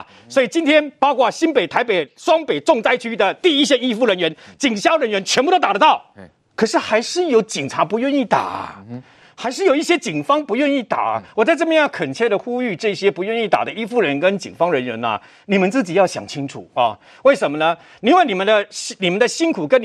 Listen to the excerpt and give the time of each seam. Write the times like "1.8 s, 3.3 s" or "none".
none